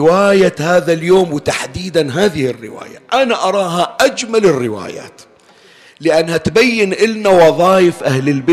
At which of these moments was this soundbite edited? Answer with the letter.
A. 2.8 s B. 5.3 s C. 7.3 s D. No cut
D